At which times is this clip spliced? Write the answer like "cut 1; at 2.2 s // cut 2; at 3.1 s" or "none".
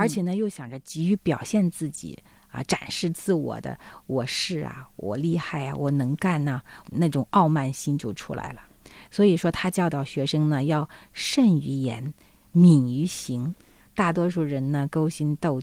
cut 1; at 13.8 s

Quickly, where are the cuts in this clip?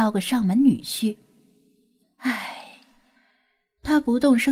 cut 1; at 2.0 s

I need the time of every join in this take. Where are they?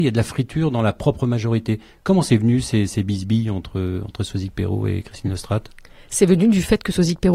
none

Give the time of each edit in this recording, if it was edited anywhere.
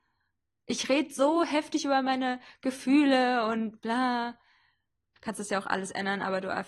cut 1; at 5.2 s

